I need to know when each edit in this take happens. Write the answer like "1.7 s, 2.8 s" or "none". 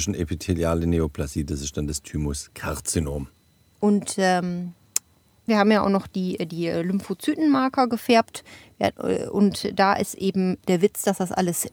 3.7 s, 5.5 s